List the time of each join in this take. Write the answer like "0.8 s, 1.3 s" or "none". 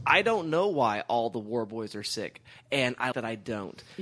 3.1 s